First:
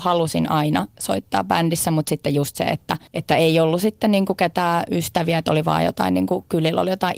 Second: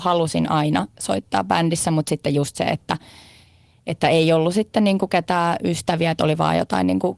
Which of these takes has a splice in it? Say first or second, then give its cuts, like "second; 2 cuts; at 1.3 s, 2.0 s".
first; 1 cut; at 3.1 s